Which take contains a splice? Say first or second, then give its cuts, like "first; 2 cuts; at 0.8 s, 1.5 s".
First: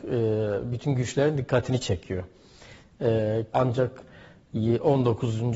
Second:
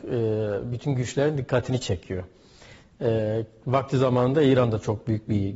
first; 1 cut; at 3.5 s